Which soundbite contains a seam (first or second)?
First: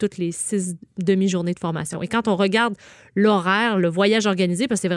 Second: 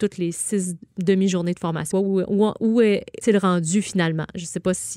second